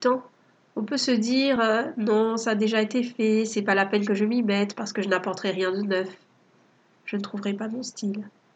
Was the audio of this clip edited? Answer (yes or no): no